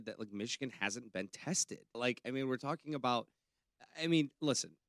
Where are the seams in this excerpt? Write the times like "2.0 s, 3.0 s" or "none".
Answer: 1.9 s